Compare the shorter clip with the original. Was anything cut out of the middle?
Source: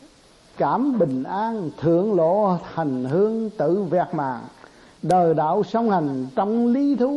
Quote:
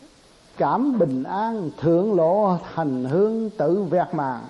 no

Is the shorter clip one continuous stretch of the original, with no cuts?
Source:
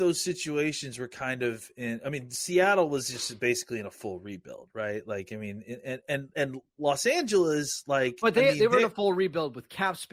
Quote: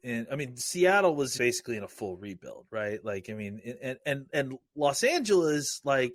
no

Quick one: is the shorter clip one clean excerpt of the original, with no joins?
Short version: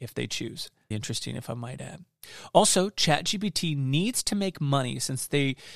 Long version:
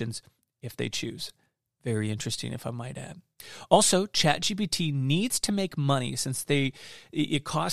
no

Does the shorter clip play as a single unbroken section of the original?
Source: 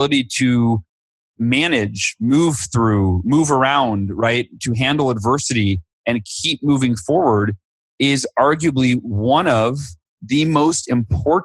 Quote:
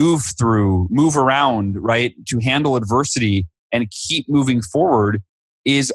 yes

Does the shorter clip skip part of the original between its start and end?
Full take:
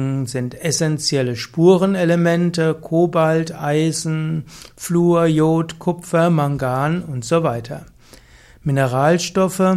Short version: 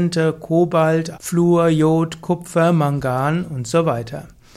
yes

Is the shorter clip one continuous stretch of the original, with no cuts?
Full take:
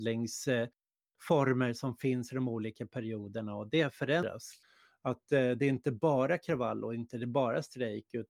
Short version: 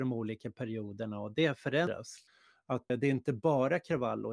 no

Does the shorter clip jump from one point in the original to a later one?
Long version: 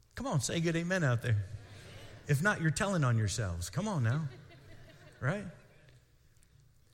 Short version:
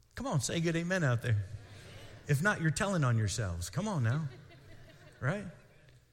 no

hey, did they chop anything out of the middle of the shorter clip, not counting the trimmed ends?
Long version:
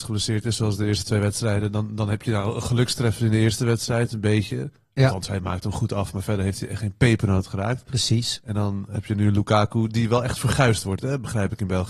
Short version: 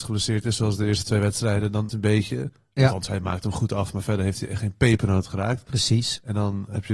yes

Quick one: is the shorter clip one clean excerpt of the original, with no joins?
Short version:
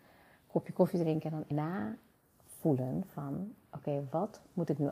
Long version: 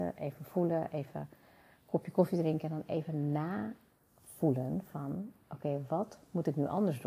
no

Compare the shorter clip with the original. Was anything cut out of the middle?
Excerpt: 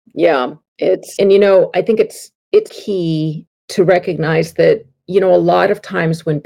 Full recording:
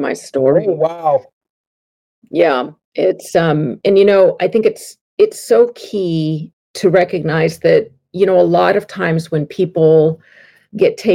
yes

